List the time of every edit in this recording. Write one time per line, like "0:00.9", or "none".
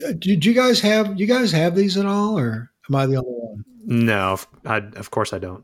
none